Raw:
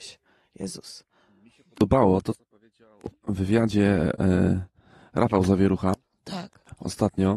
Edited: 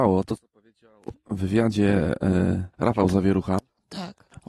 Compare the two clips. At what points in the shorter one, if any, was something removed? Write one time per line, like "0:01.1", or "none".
0:02.7